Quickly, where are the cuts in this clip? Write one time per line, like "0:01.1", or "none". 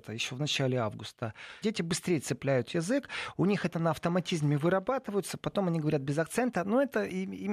0:01.6